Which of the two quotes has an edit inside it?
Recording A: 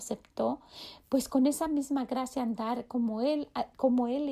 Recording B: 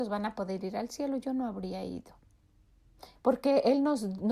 B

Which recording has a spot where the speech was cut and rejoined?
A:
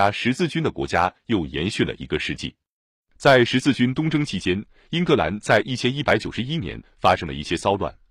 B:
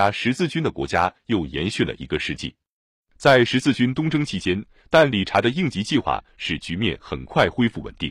B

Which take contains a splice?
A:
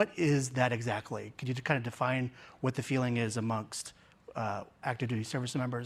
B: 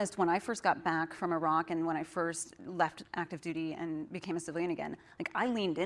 A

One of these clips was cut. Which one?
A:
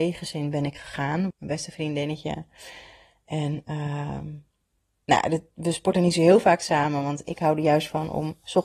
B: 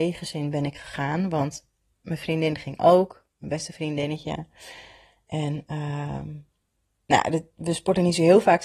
A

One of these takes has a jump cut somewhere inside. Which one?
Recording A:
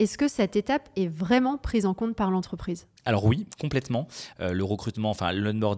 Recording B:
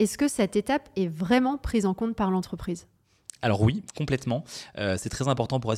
A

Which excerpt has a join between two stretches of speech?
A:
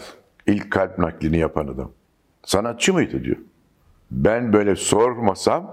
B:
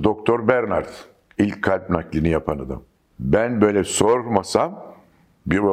B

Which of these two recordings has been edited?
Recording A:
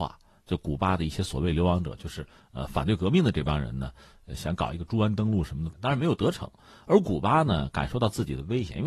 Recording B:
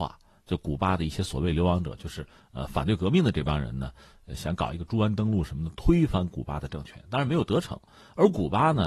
A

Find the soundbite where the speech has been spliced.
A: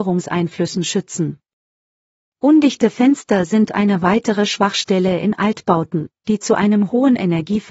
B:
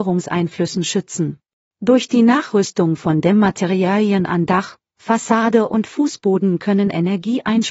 B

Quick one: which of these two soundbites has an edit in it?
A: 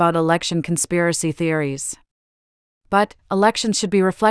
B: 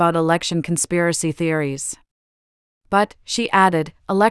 A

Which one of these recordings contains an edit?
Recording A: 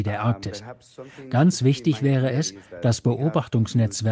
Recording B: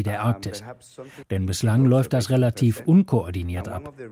B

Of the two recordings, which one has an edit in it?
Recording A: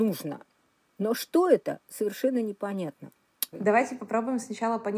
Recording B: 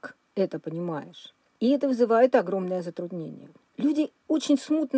A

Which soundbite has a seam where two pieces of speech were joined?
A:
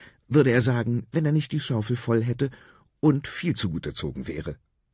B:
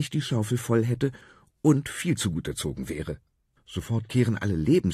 B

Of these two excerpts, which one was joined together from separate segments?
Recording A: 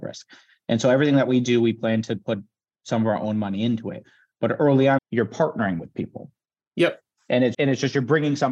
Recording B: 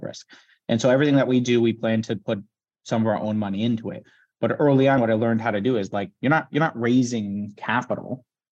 A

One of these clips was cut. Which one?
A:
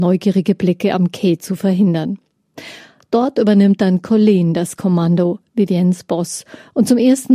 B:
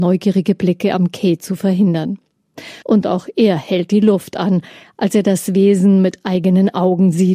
B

